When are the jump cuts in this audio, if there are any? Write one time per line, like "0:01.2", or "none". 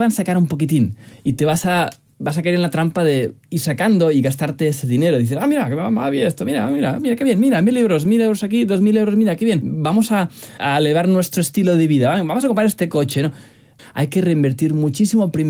0:10.6
0:13.8